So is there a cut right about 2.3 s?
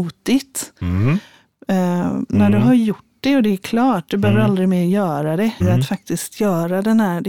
yes; 2 cuts; at 2.3 s, 5.6 s

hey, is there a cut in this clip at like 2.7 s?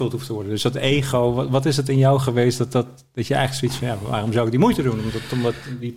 no; 0 cuts

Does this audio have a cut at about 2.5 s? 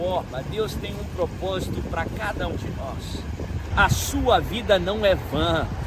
yes; 2 cuts; at 2.5 s, 3.7 s

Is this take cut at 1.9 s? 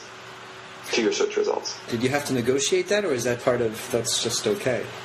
yes; 2 cuts; at 1.9 s, 3.4 s

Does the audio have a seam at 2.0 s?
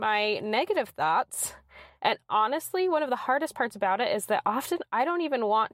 yes; 1 cut; at 2.0 s

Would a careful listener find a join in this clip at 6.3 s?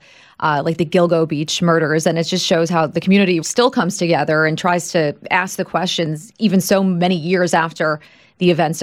no; 1 cut; at 3.4 s

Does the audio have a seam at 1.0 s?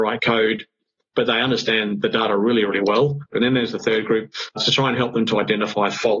no; 2 cuts; at 3.3 s, 4.5 s

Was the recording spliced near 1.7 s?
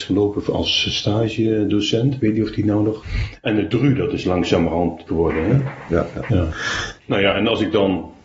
no; 2 cuts; at 5.1 s, 6.3 s

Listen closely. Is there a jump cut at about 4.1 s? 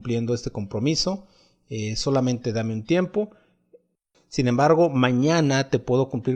yes; 1 cut; at 4.1 s

